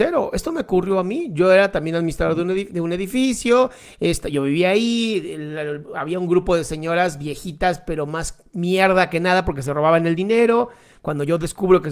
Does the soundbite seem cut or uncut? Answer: uncut